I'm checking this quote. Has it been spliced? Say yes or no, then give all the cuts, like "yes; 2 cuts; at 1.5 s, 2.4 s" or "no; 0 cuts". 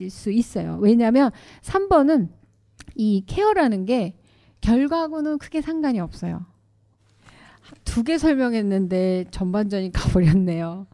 no; 0 cuts